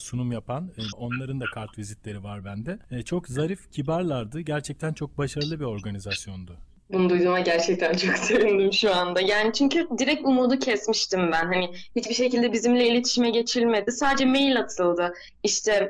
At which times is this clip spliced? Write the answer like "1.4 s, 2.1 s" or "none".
0.9 s